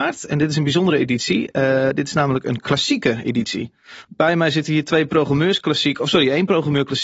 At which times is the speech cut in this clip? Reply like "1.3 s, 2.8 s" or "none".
4.0 s